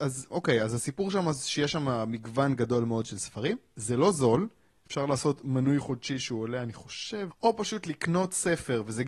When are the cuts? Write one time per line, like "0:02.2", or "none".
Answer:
0:07.3